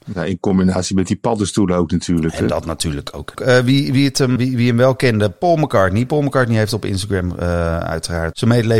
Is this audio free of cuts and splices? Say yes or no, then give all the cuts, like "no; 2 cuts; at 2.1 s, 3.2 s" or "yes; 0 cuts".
no; 2 cuts; at 3.4 s, 4.4 s